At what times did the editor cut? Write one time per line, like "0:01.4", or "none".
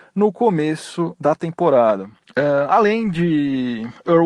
none

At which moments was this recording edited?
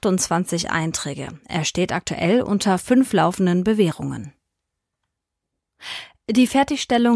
none

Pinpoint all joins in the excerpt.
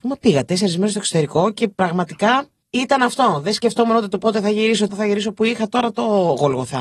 0:04.9

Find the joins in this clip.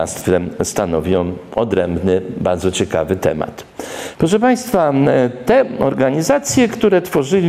0:04.1

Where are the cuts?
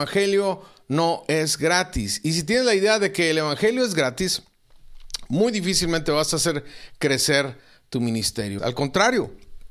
0:08.6

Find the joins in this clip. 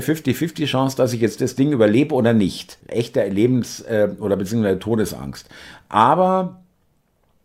0:02.8

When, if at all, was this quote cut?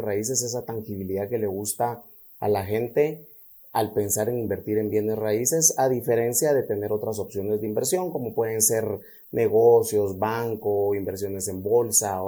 none

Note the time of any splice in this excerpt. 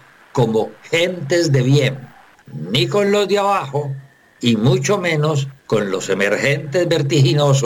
0:02.4
0:05.6

